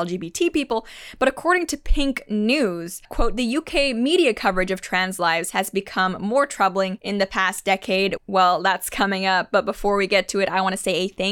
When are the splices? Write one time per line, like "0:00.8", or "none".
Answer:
0:08.2